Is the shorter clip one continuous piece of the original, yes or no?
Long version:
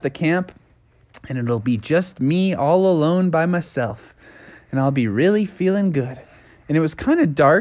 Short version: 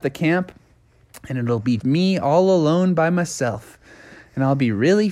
no